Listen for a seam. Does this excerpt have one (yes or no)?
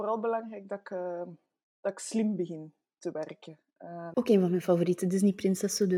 yes